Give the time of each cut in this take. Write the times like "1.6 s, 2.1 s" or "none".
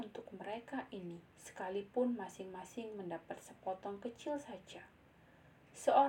1.3 s